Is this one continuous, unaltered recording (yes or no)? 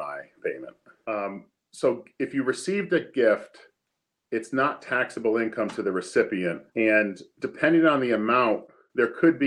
no